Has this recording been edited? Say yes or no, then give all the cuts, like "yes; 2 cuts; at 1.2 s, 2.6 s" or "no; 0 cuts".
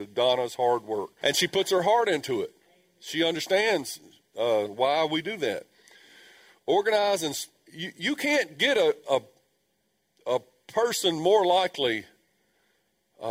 yes; 1 cut; at 1.2 s